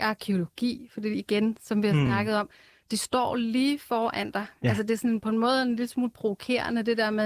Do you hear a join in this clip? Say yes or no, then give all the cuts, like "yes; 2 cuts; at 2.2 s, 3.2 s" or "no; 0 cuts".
no; 0 cuts